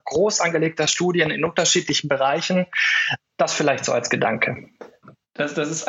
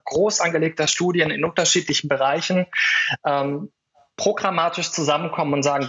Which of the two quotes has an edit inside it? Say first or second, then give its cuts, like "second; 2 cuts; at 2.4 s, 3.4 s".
first; 1 cut; at 3.2 s